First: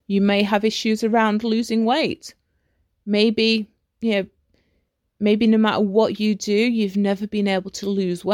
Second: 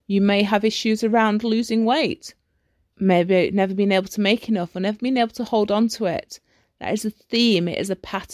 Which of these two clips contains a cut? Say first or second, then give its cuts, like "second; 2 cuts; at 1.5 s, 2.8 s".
second; 1 cut; at 2.9 s